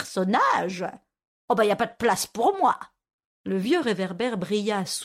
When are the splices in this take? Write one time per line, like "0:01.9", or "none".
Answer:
0:03.3